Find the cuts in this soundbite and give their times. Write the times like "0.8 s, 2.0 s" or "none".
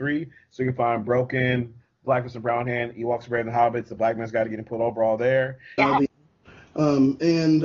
5.8 s